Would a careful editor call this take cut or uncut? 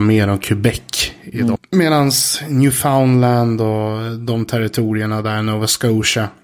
cut